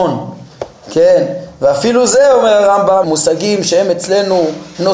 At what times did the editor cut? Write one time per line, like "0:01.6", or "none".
0:03.0